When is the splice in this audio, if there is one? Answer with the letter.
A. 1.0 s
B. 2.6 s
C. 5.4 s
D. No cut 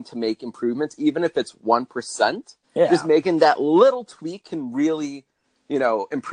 B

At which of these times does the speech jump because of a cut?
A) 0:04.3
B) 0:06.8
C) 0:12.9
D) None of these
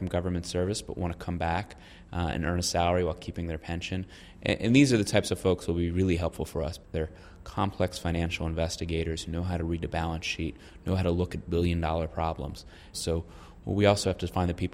C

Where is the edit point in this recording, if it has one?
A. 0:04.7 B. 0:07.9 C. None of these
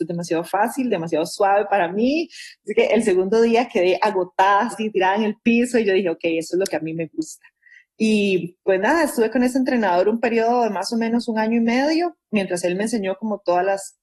A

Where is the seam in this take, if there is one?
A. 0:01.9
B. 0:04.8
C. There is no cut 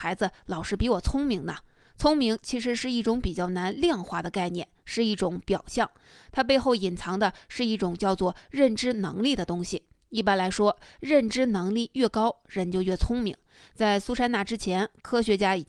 C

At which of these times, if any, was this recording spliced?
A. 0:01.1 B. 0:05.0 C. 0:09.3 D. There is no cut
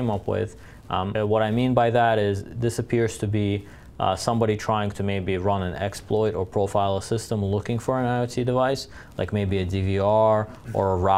A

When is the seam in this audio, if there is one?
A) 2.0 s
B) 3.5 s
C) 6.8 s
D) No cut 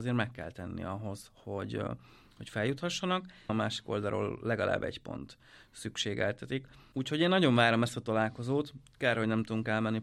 B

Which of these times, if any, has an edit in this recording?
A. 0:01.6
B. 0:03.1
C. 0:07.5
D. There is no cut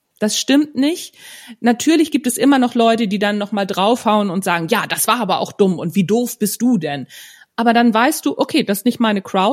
D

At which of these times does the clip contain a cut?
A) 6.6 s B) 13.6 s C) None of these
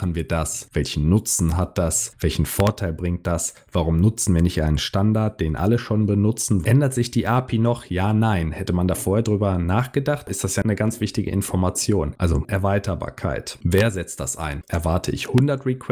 A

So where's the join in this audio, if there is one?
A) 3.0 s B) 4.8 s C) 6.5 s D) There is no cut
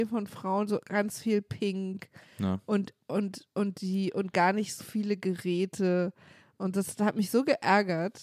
B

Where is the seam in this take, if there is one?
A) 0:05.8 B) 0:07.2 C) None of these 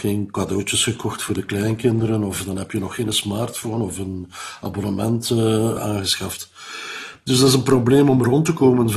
A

